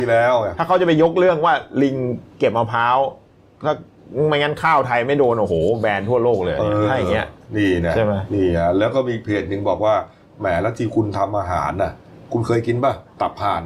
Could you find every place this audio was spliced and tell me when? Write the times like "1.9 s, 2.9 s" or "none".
none